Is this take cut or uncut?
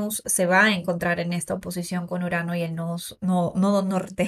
uncut